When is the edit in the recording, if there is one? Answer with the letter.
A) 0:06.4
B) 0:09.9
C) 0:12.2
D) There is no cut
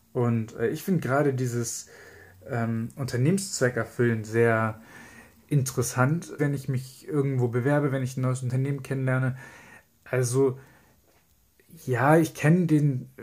A